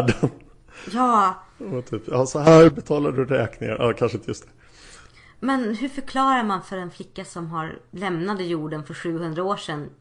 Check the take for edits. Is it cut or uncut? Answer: uncut